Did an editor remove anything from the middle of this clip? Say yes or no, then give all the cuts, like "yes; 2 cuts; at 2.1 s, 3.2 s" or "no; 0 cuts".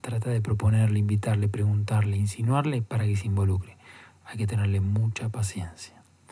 no; 0 cuts